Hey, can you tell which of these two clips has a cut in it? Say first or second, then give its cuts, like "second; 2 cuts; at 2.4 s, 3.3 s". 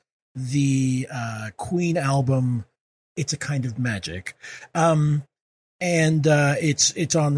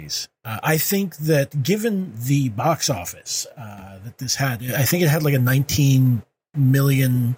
first; 1 cut; at 2.9 s